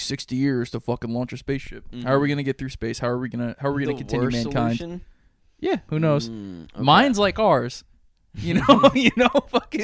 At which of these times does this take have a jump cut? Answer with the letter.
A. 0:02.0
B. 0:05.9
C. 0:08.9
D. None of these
B